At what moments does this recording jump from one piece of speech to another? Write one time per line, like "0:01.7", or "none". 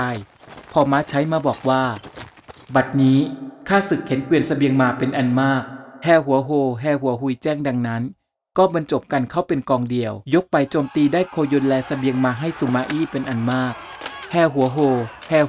0:10.2